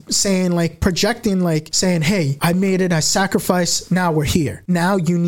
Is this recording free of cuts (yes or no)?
yes